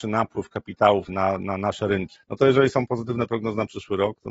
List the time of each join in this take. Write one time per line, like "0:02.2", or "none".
0:01.1
0:02.2